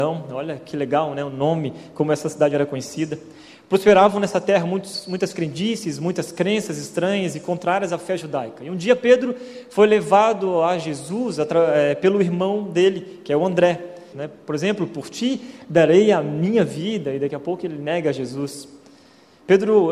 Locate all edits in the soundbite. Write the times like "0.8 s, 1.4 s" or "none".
14.1 s